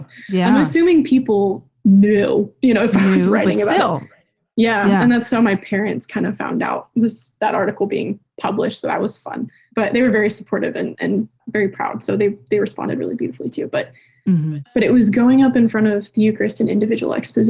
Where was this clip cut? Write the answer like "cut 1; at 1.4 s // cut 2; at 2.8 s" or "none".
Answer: none